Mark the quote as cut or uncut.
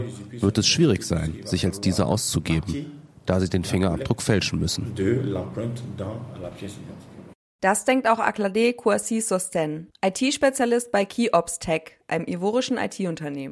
uncut